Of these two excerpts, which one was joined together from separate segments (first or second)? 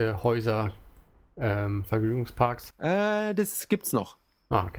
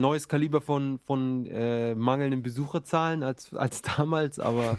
first